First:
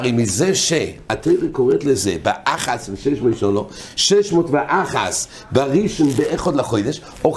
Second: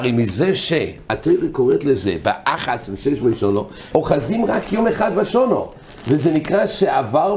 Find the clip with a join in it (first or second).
second